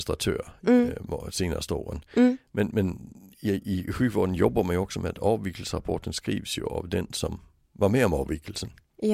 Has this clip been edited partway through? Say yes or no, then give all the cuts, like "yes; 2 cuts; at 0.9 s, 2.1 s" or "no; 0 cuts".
no; 0 cuts